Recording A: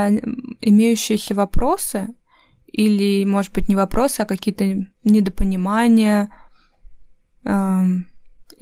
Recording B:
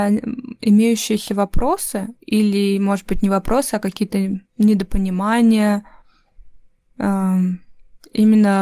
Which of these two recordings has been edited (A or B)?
B